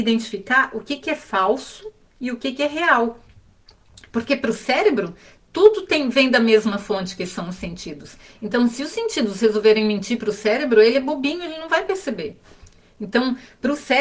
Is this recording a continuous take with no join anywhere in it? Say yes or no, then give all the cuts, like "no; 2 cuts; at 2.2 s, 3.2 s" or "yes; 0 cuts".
yes; 0 cuts